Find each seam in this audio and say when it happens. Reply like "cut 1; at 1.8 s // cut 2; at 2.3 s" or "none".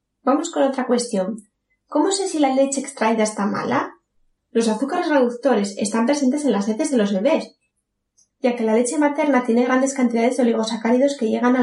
cut 1; at 4.4 s